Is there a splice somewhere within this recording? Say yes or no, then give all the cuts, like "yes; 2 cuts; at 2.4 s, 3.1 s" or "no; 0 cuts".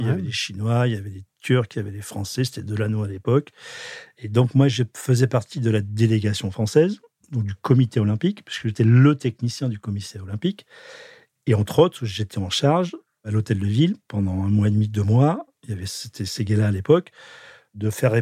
no; 0 cuts